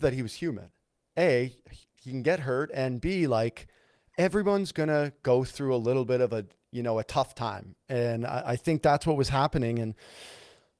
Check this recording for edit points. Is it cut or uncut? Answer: uncut